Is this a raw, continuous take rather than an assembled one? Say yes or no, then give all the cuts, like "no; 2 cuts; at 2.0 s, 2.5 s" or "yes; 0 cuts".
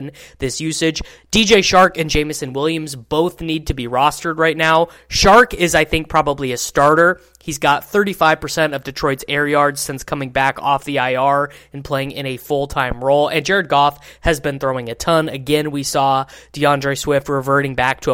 yes; 0 cuts